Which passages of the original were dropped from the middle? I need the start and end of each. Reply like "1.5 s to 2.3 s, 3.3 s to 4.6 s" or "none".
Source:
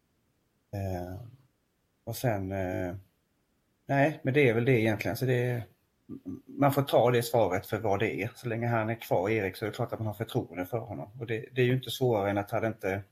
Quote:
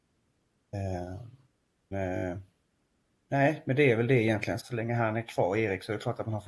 1.9 s to 2.5 s, 5.2 s to 8.3 s